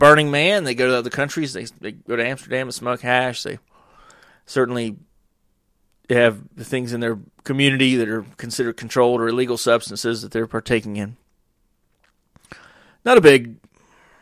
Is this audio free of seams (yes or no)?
yes